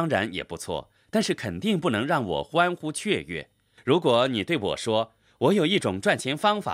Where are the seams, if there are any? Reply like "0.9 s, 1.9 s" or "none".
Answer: none